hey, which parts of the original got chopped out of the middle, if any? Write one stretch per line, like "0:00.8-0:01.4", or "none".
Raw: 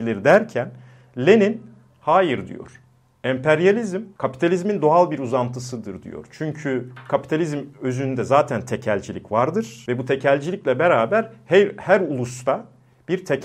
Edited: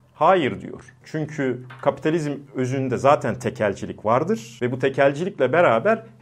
0:02.9-0:06.3